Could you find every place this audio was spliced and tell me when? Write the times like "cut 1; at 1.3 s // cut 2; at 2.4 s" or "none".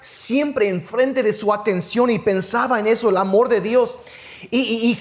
none